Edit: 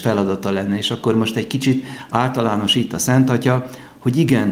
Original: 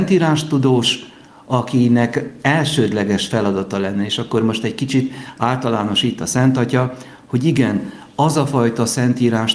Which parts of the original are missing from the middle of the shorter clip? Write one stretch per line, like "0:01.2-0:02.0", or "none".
none